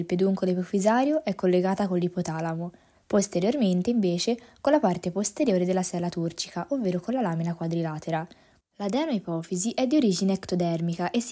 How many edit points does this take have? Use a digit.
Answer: 2